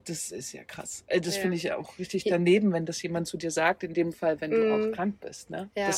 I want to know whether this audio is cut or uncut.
uncut